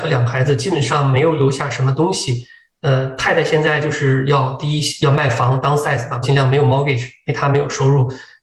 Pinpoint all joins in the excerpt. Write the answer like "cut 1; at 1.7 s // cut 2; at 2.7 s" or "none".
cut 1; at 6.2 s